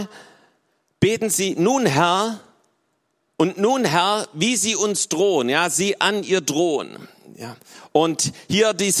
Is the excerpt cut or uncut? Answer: uncut